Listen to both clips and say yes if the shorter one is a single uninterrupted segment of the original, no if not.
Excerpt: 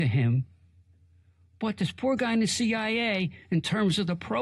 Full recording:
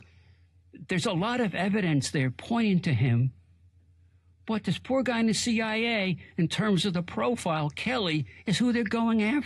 yes